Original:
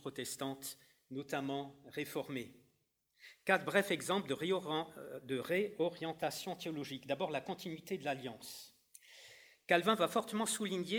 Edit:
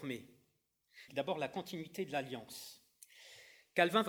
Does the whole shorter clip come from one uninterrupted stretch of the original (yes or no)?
no